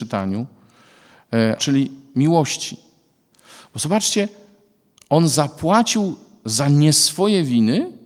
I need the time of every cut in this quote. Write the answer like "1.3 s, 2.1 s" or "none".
1.6 s